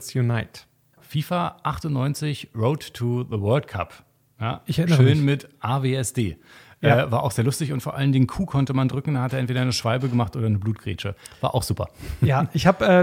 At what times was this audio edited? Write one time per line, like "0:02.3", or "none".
0:01.0